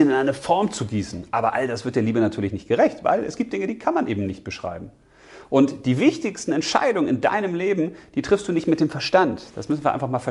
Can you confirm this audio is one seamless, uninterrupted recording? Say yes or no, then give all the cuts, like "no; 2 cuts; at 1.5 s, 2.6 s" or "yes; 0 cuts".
yes; 0 cuts